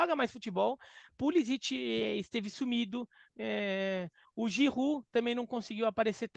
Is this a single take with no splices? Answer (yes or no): no